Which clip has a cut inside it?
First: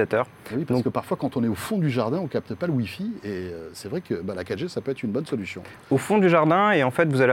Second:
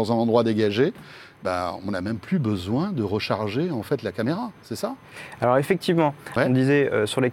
second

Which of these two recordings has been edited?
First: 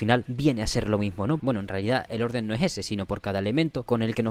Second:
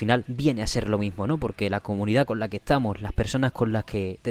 first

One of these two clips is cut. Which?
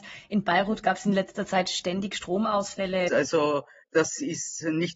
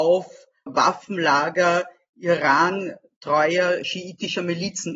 first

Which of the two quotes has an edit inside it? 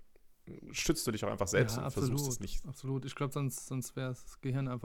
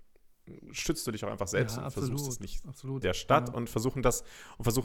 second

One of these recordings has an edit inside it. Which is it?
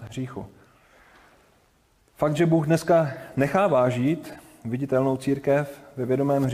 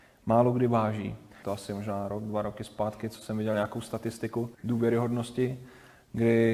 second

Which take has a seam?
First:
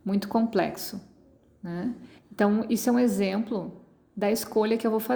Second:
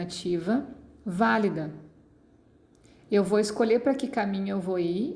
first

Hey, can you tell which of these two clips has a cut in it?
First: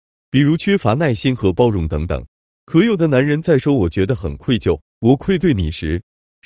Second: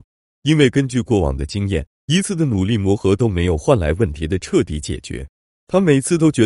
second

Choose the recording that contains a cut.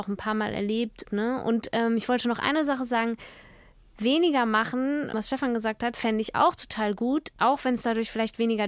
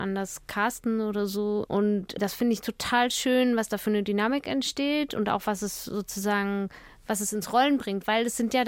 first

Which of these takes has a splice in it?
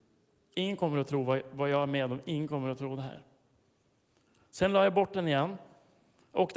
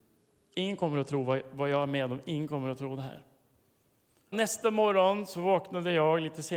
second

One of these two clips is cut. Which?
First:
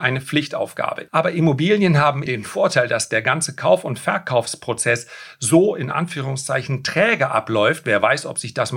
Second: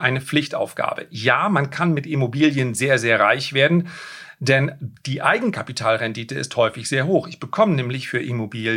first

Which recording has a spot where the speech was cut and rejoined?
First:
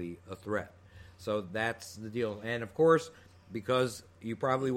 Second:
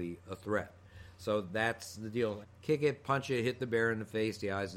second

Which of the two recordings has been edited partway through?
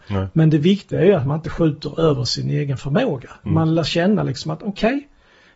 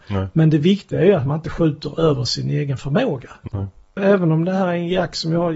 second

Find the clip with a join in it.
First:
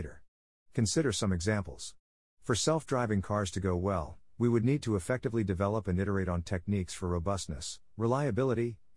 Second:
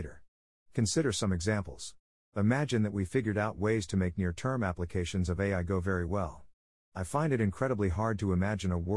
second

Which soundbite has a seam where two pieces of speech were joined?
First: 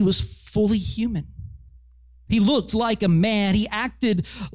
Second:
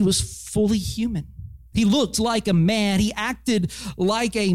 second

